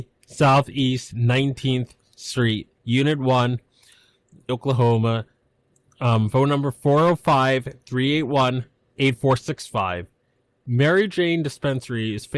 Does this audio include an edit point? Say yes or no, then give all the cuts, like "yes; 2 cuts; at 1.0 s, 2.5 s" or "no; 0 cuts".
yes; 1 cut; at 4.5 s